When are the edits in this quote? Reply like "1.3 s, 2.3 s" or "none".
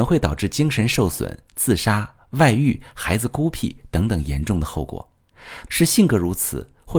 5.7 s

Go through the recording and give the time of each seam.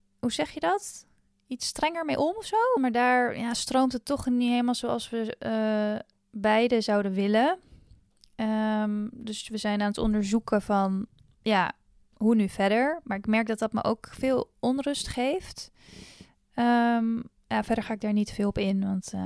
2.8 s

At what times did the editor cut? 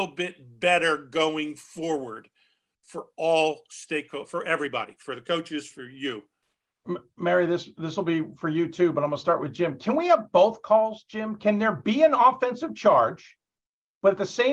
5.7 s

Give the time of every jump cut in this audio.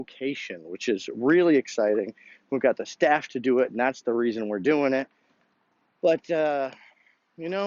none

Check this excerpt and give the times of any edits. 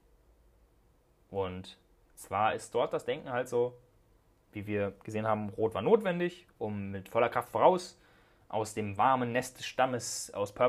none

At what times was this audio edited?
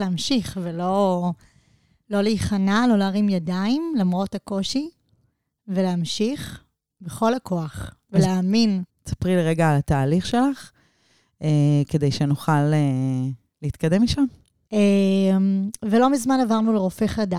8.9 s, 14.7 s

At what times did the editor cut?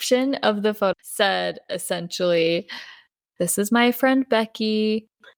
0.9 s

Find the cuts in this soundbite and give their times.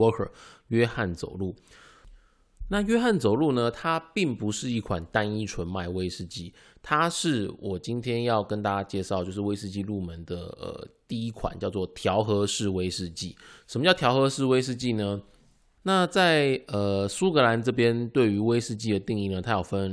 15.8 s

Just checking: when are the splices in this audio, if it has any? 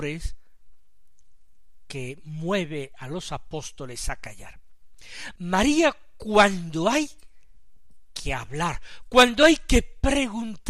5.4 s

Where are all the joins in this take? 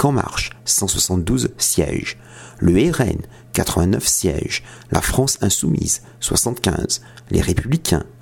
none

